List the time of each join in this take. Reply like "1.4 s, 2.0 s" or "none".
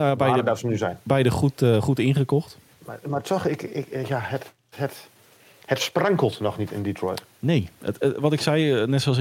2.7 s